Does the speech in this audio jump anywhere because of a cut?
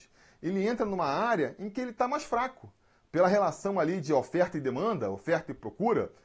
no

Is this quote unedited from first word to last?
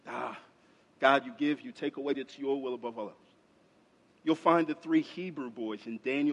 no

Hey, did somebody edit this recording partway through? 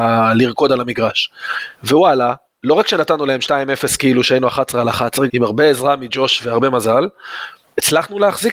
yes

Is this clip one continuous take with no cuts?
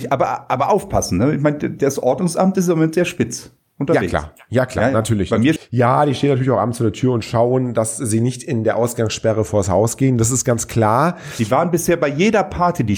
no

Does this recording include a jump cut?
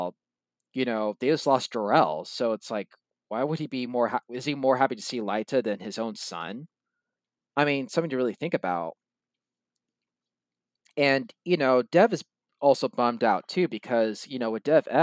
no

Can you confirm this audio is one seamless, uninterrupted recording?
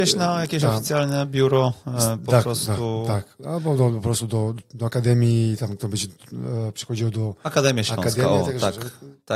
yes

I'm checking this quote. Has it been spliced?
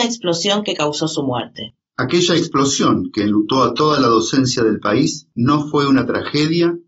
no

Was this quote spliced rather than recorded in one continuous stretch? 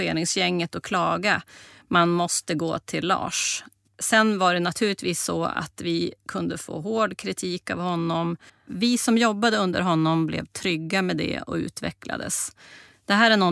yes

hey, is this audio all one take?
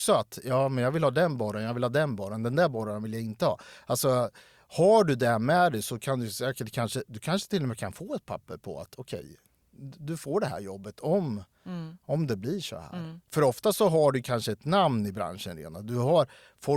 no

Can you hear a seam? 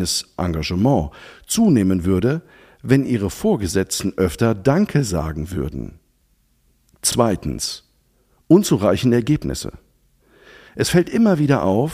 no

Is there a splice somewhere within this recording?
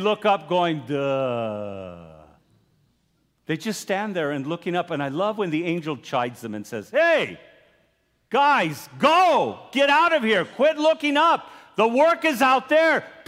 no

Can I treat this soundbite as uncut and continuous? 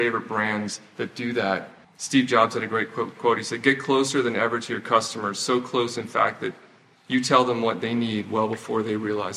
no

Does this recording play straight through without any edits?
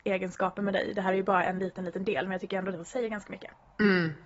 yes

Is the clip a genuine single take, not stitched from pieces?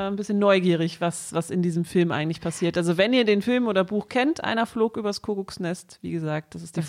yes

